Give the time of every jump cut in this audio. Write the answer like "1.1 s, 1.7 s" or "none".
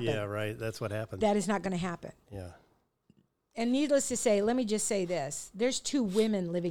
none